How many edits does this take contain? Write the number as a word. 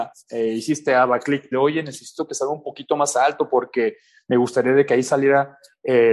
one